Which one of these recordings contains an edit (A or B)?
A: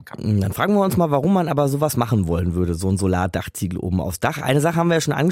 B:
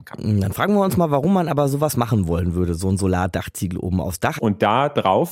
B